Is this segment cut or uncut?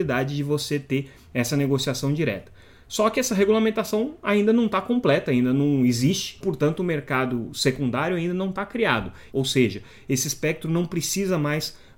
cut